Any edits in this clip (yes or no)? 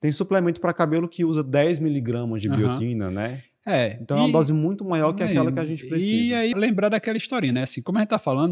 yes